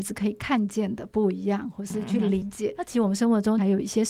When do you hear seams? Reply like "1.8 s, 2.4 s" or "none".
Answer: none